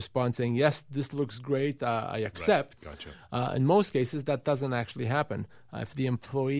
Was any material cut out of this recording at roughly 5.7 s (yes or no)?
no